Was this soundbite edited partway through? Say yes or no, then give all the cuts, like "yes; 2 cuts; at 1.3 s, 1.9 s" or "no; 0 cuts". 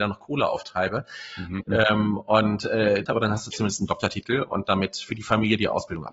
yes; 2 cuts; at 1.6 s, 3.1 s